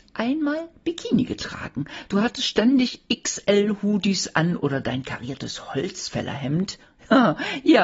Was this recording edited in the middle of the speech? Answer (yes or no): no